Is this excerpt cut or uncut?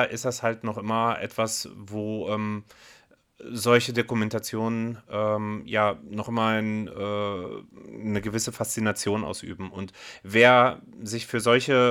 uncut